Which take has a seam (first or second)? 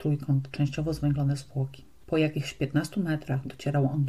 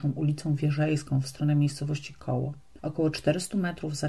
first